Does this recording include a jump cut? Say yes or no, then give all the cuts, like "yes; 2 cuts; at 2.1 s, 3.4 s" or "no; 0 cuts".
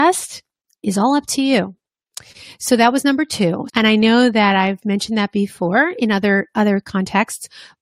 yes; 1 cut; at 3.7 s